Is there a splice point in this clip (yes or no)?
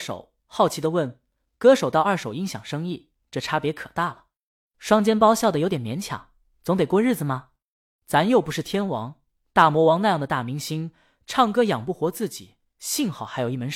no